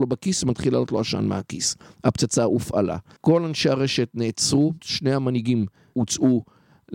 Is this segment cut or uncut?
cut